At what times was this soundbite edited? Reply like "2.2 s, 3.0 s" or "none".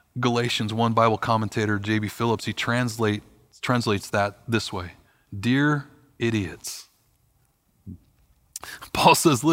none